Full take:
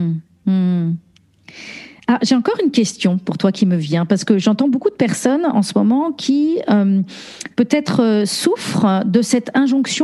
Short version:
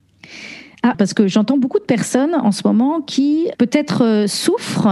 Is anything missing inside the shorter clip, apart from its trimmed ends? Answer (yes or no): yes